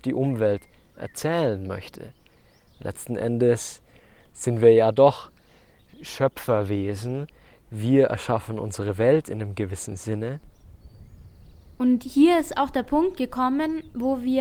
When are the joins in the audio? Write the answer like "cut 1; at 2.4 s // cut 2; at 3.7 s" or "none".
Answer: none